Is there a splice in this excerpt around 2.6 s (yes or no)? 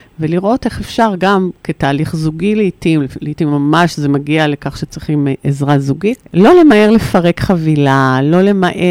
no